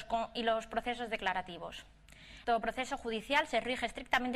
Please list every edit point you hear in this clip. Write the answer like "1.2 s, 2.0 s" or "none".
2.4 s